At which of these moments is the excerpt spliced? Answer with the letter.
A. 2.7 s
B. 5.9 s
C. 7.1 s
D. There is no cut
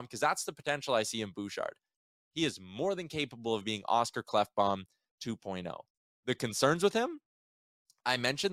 D